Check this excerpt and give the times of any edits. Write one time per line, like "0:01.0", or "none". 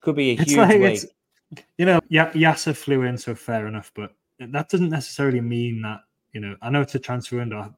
0:02.0

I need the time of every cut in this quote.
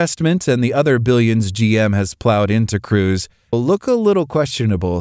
0:03.5

